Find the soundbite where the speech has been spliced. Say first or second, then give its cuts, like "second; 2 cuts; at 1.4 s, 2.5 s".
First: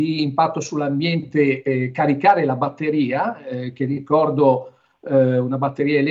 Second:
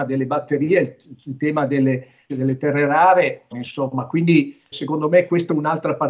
second; 3 cuts; at 2.3 s, 3.5 s, 4.7 s